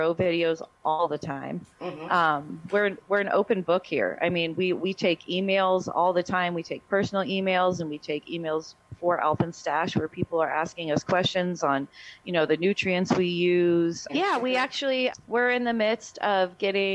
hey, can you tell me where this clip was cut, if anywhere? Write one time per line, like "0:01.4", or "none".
0:14.1
0:15.1

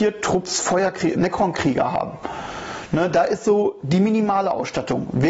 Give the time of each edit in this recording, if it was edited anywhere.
0:01.1

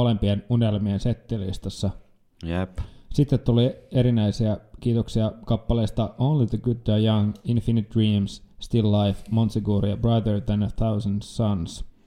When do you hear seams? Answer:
none

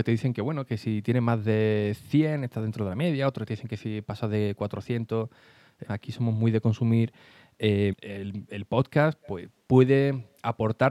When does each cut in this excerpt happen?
0:05.9
0:07.9

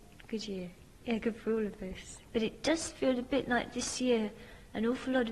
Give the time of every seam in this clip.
0:01.0
0:02.3

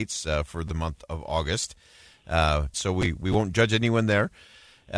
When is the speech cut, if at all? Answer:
0:02.7

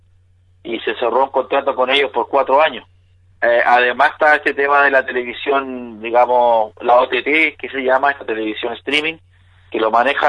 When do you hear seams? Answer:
0:03.3

